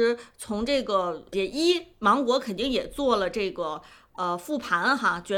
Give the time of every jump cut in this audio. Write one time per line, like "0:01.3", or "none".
0:01.3